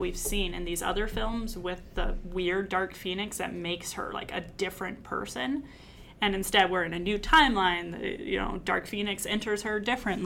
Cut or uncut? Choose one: uncut